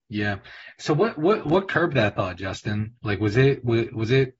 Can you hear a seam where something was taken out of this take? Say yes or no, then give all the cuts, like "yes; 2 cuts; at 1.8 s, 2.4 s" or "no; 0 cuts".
no; 0 cuts